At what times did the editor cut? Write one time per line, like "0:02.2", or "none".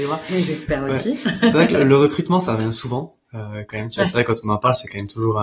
none